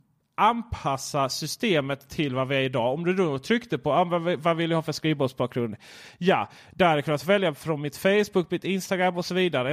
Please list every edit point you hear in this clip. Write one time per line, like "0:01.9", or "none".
none